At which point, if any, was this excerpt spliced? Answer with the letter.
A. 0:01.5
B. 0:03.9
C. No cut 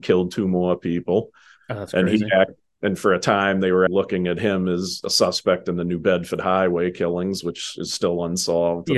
B